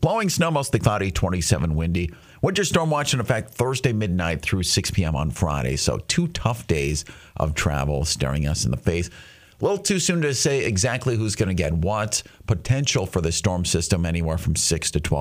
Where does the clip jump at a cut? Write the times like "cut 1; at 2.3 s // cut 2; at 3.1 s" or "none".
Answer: none